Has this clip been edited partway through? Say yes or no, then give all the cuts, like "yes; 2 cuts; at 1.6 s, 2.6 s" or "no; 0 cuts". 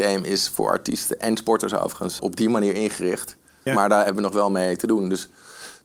yes; 2 cuts; at 2.2 s, 3.7 s